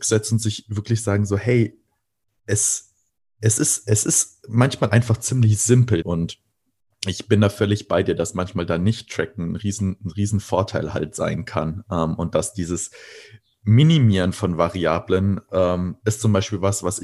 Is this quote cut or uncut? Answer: cut